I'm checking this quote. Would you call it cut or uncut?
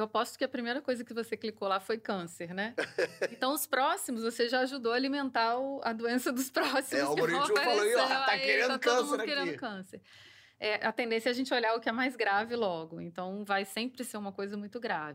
uncut